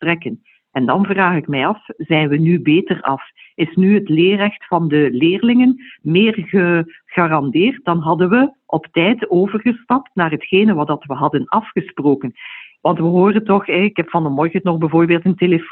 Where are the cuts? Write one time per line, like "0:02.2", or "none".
0:12.7

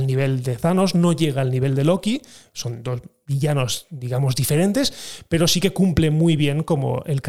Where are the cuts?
none

